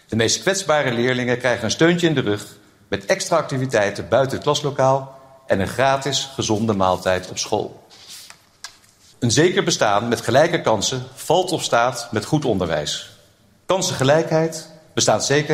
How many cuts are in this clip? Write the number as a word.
two